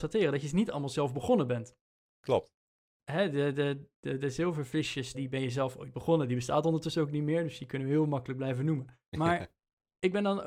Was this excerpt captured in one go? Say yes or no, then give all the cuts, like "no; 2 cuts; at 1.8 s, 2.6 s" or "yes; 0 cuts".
no; 2 cuts; at 5.1 s, 9.1 s